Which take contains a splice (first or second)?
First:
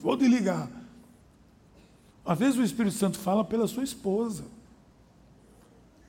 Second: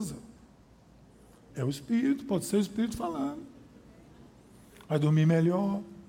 second